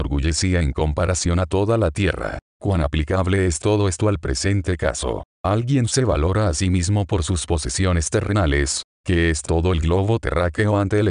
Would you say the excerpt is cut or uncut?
uncut